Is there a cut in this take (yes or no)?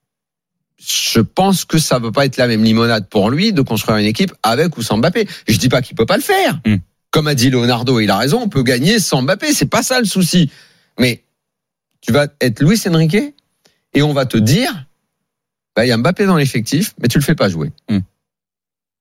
no